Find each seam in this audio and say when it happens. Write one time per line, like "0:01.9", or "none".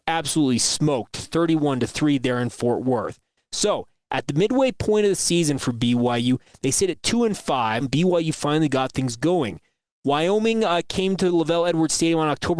0:07.8